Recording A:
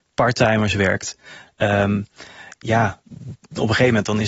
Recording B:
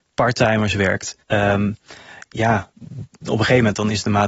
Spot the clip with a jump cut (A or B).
B